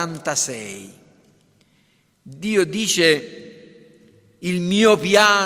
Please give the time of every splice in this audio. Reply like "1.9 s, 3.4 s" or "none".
none